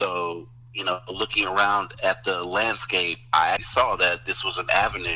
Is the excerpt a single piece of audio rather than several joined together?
no; 1 cut; at 3.6 s

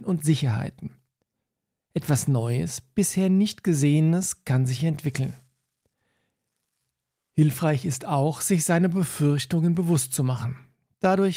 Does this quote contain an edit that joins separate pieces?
yes; 1 cut; at 1.8 s

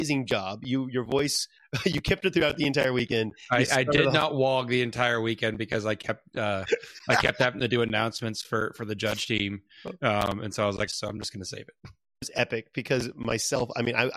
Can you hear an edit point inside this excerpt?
yes; 1 cut; at 10.9 s

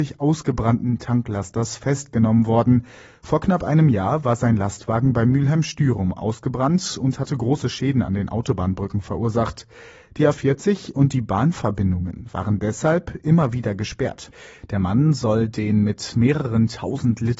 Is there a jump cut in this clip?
no; 0 cuts

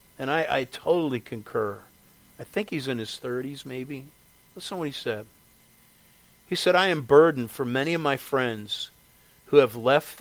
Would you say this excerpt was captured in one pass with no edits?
yes; 0 cuts

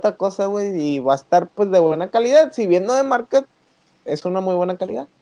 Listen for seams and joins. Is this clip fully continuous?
yes; 0 cuts

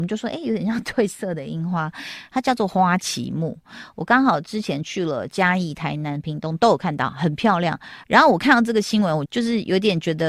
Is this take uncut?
no; 2 cuts; at 8.0 s, 9.3 s

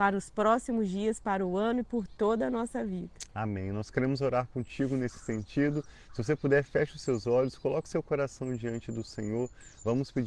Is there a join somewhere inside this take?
no; 0 cuts

